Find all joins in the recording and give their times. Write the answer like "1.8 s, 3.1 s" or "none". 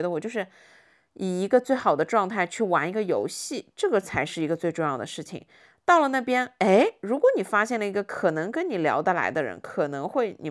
none